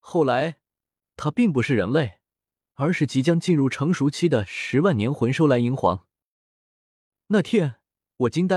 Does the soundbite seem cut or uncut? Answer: cut